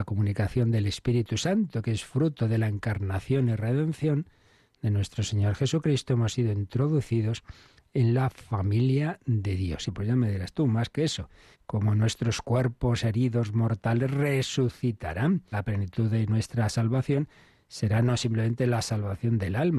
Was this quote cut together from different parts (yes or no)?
yes